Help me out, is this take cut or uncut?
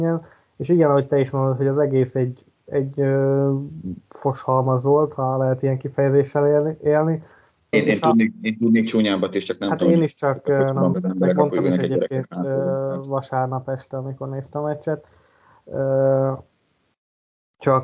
cut